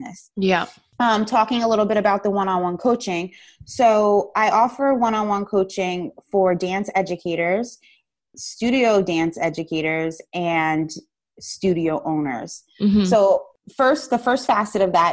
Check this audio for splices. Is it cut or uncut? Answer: cut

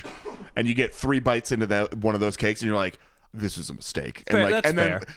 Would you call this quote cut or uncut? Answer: uncut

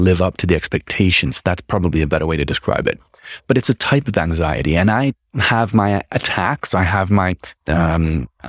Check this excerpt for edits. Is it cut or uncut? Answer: cut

